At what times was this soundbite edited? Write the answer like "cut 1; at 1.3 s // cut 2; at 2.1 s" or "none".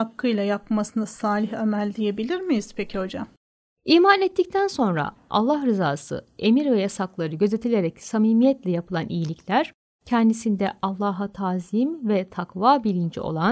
cut 1; at 3.7 s